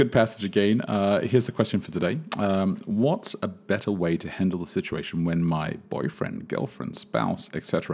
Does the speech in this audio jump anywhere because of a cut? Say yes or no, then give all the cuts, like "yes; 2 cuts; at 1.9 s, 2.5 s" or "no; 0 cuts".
no; 0 cuts